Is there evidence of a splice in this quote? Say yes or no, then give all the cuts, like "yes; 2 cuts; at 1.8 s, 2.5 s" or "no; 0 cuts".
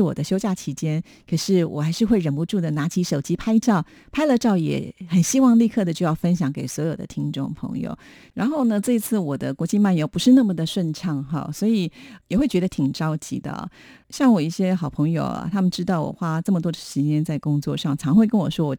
no; 0 cuts